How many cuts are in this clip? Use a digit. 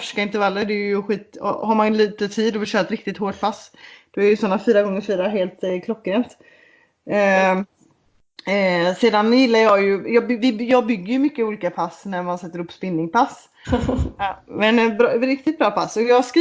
1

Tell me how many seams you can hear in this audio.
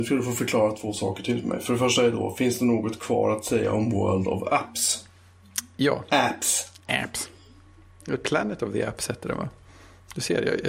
0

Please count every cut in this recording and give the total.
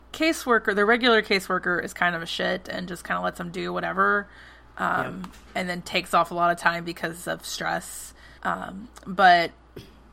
1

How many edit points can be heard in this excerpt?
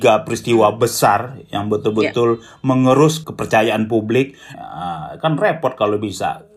1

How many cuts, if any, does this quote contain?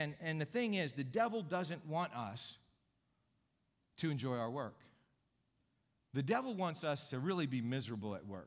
0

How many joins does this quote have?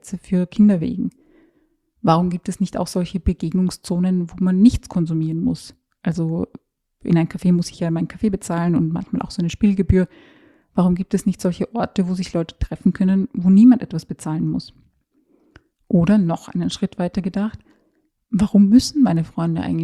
0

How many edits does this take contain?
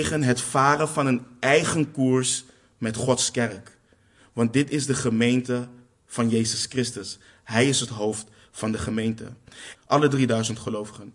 1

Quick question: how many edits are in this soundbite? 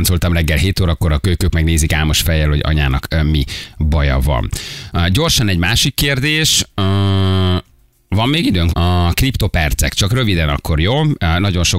1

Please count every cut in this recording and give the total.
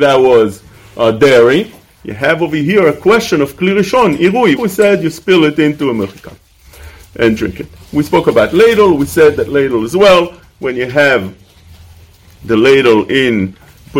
2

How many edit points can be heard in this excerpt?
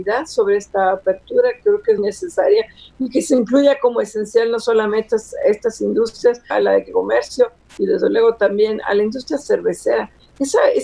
2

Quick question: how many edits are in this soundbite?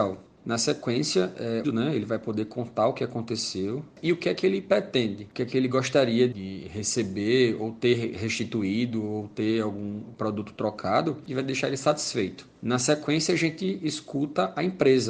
1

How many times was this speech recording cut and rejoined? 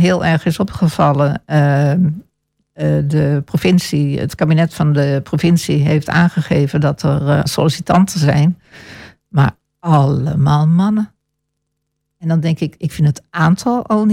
1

